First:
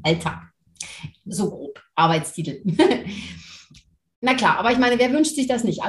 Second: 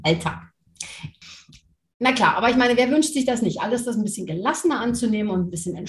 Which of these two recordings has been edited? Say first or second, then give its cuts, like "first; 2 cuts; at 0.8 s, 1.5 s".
second; 1 cut; at 1.2 s